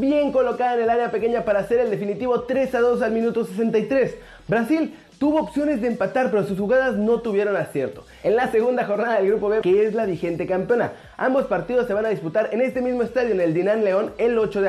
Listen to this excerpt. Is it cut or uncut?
cut